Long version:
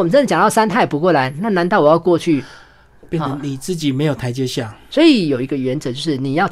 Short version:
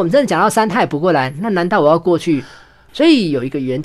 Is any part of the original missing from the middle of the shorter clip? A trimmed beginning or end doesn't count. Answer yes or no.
yes